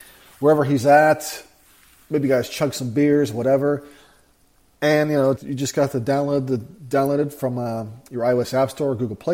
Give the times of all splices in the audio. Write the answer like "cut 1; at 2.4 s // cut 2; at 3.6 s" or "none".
cut 1; at 5.4 s